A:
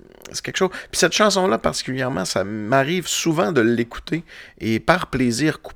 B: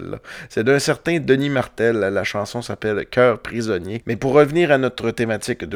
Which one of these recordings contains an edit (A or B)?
B